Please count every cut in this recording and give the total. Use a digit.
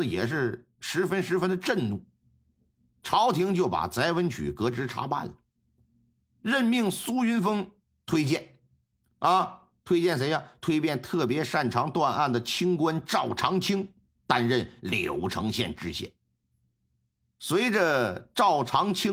0